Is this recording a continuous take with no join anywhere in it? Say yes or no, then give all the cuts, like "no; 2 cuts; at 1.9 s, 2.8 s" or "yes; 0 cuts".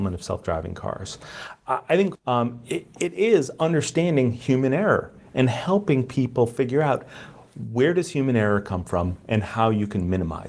no; 1 cut; at 2.2 s